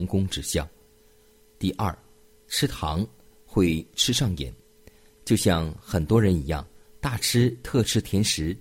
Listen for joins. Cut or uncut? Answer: uncut